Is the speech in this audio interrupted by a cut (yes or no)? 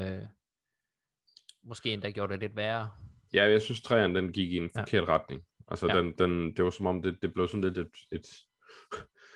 no